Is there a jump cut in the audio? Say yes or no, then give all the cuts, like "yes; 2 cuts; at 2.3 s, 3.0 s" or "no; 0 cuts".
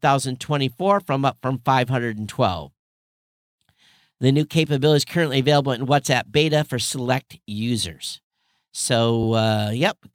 no; 0 cuts